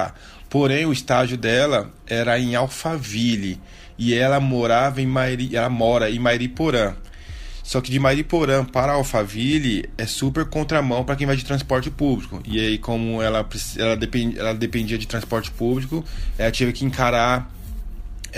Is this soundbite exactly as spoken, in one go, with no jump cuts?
yes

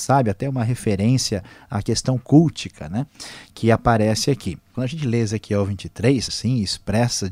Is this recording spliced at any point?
yes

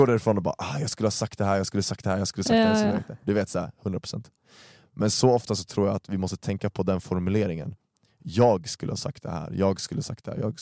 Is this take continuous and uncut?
yes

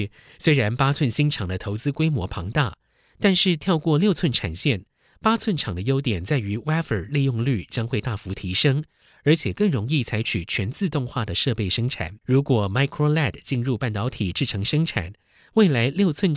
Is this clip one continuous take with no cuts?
no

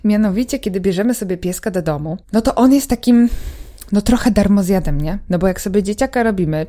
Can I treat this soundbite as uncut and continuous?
no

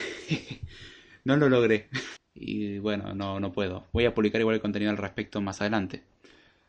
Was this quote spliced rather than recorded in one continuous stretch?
yes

